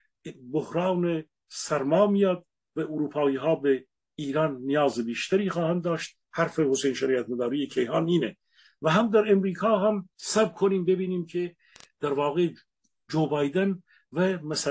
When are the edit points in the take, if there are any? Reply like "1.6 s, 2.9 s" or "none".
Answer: 10.1 s